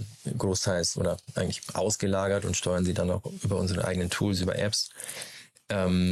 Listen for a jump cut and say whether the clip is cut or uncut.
uncut